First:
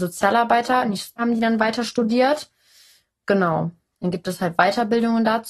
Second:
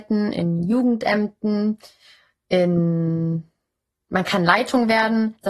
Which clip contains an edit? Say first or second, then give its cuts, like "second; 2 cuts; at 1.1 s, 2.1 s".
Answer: first; 2 cuts; at 1.2 s, 3.9 s